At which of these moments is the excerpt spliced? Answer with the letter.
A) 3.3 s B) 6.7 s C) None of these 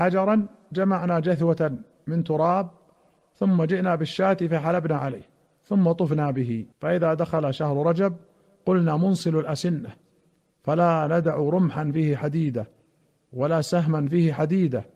B